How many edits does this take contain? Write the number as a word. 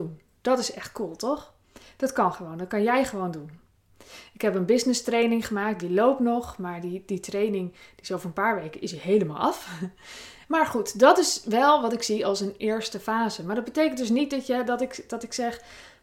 one